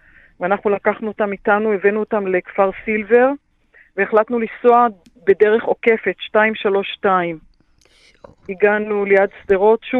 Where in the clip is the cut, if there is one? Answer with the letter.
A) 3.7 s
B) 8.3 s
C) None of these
C